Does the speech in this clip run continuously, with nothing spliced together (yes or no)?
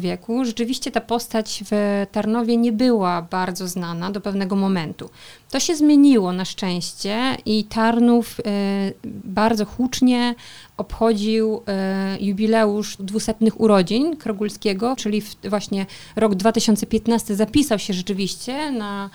yes